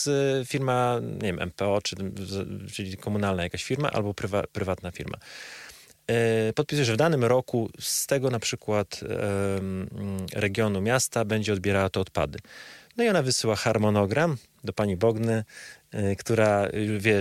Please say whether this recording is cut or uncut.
uncut